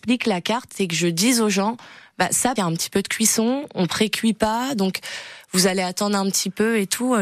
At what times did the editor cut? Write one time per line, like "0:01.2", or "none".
0:02.6

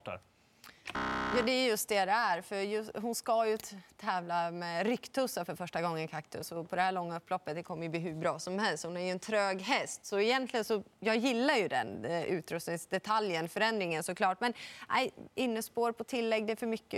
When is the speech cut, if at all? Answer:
none

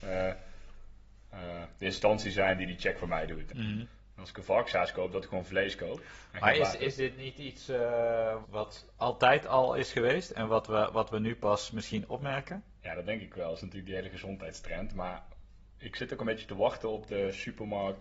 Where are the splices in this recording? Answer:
0:03.5
0:08.4

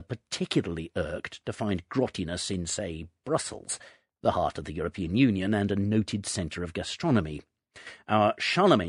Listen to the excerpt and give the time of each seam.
none

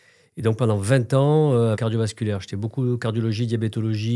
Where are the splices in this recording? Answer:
0:01.7

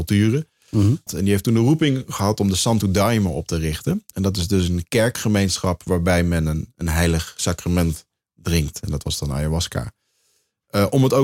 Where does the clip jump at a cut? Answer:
0:01.1

